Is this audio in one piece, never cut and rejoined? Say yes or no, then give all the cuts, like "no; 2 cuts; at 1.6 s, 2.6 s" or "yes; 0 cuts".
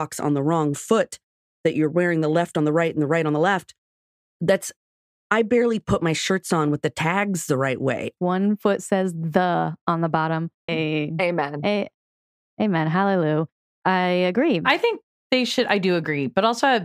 no; 2 cuts; at 8.2 s, 10.7 s